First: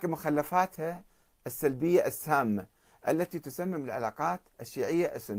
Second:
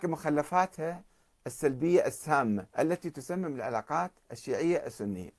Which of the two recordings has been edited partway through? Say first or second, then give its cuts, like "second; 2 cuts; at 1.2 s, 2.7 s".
second; 1 cut; at 2.7 s